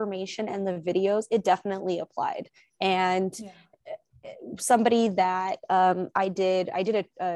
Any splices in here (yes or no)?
no